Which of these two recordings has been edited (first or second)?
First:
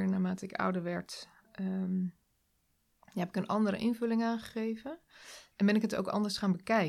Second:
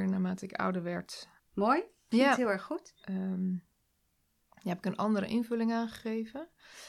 second